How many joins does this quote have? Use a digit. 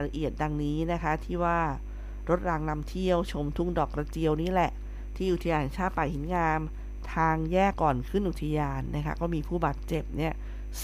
1